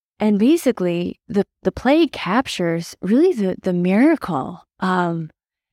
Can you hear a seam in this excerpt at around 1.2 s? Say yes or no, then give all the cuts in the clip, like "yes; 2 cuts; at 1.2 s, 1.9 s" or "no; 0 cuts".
yes; 1 cut; at 1.2 s